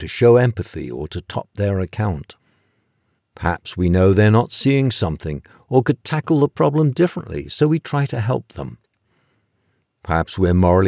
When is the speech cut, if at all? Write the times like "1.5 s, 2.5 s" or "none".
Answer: none